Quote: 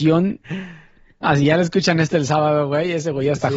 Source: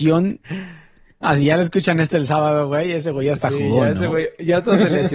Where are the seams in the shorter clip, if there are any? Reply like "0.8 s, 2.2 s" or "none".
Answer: none